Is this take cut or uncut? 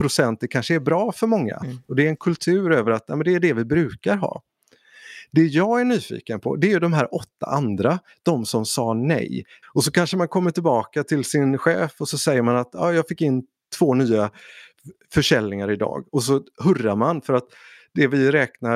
cut